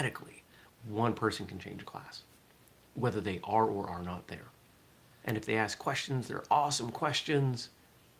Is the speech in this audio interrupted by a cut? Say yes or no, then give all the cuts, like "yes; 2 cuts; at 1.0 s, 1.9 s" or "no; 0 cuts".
yes; 1 cut; at 5.2 s